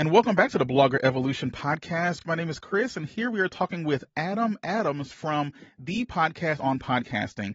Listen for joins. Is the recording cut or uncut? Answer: uncut